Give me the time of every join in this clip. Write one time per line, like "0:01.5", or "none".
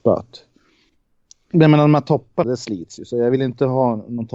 0:02.4